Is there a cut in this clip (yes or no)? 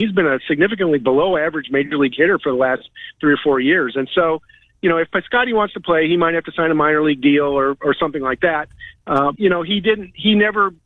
yes